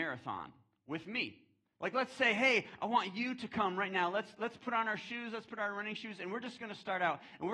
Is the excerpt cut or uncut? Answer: uncut